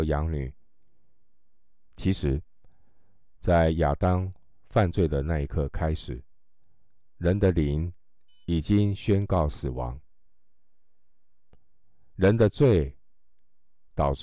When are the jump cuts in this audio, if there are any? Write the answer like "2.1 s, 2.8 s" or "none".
1.9 s